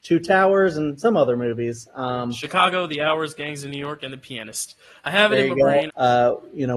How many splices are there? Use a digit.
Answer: 1